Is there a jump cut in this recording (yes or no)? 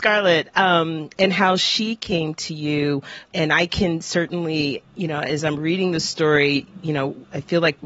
no